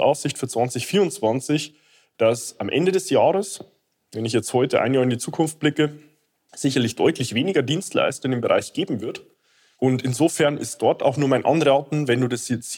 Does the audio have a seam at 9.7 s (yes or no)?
yes